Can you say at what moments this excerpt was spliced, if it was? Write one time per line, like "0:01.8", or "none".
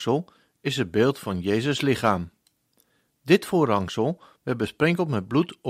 none